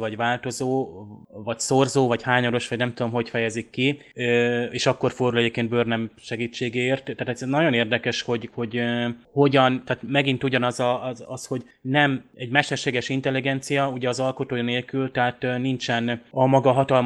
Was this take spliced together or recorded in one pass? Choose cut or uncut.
cut